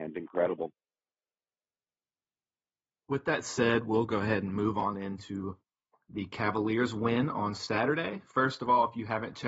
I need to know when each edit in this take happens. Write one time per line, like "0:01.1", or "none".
none